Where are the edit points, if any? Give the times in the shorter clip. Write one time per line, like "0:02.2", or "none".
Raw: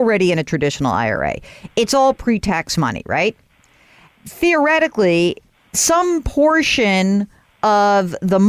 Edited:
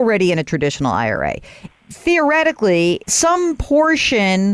0:01.7
0:03.0